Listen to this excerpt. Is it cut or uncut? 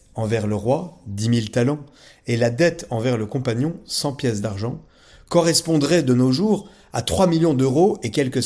uncut